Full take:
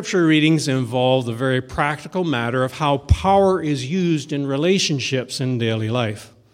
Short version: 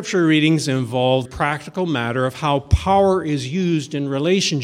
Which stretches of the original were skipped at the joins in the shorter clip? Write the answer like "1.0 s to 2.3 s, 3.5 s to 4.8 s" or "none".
1.2 s to 1.6 s